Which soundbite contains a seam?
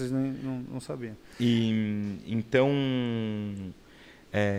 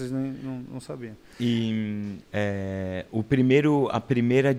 second; 1 cut; at 2.2 s

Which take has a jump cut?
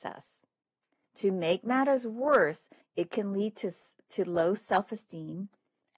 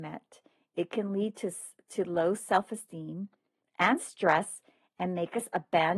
first; 2 cuts; at 1.0 s, 2.8 s

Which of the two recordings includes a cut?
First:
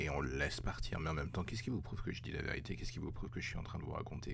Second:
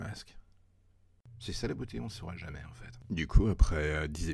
second; 1 cut; at 1.3 s

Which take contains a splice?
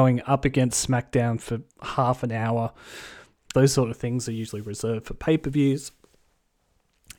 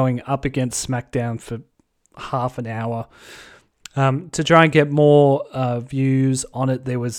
first; 2 cuts; at 1.7 s, 3.5 s

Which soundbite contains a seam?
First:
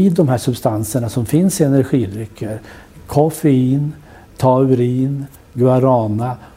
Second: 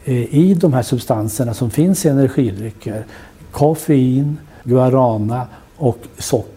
second; 1 cut; at 4.6 s

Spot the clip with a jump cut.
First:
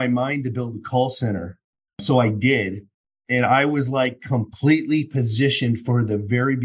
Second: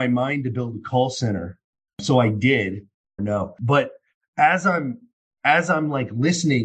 second; 1 cut; at 3.2 s

